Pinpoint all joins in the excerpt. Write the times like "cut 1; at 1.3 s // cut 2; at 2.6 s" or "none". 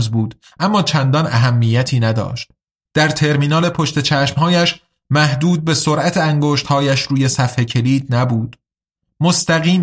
cut 1; at 2.9 s